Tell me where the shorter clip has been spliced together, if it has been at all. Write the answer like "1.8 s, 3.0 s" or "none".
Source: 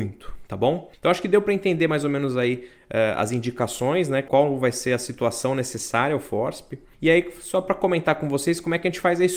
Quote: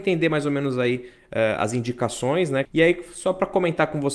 2.6 s